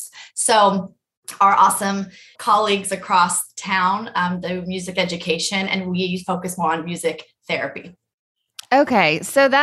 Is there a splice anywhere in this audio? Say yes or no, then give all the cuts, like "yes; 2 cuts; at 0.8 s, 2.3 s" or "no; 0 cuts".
yes; 1 cut; at 2.4 s